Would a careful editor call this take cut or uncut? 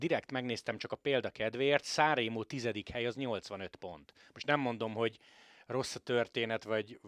uncut